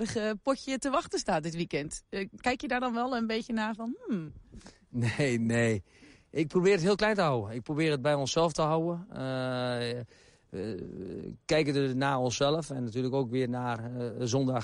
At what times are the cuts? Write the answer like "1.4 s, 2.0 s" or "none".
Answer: none